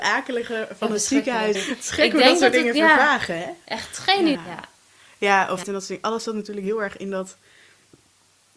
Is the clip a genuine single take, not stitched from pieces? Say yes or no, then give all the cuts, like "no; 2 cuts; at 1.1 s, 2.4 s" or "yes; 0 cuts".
no; 3 cuts; at 1.5 s, 4.3 s, 5.6 s